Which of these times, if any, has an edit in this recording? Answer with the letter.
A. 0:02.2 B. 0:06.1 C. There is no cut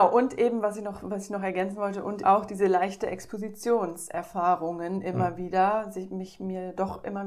A